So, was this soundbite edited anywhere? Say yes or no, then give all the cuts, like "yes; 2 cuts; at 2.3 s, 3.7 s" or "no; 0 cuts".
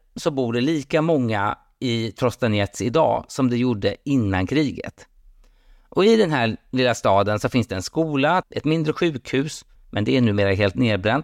yes; 2 cuts; at 8.4 s, 9.8 s